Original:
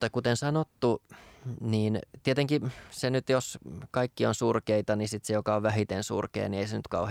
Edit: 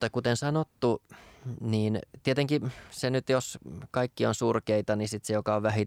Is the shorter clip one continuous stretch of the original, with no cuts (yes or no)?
yes